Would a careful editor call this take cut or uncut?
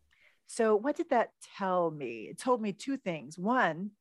uncut